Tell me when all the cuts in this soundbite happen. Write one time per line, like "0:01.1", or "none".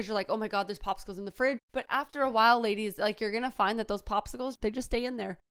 0:01.6